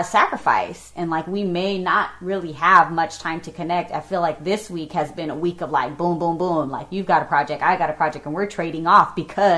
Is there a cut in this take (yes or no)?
no